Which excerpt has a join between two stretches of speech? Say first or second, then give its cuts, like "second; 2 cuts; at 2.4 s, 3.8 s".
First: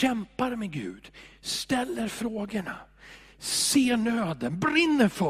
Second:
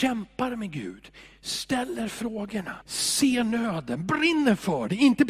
second; 1 cut; at 2.8 s